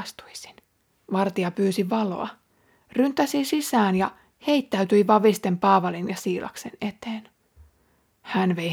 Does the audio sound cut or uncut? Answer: cut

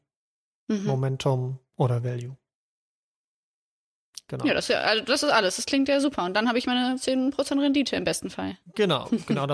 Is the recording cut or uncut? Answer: uncut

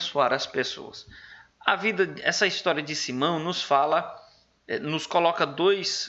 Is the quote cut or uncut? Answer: uncut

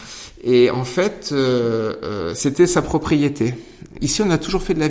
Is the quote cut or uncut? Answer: cut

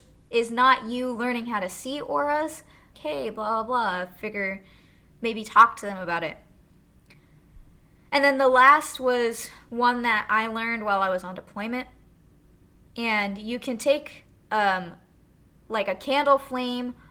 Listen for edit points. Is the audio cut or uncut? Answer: cut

